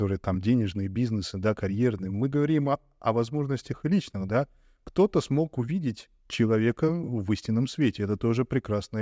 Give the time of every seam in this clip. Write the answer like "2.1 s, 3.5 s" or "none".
6.2 s